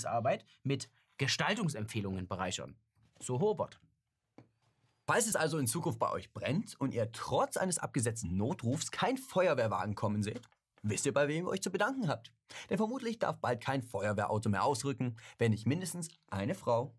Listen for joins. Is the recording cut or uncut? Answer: uncut